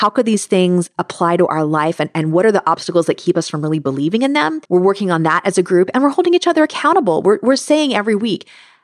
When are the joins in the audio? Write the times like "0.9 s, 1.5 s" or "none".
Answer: 4.7 s